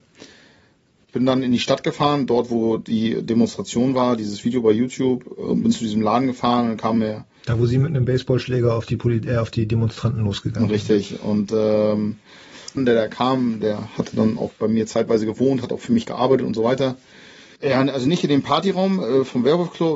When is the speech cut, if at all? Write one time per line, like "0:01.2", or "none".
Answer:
0:12.8
0:17.6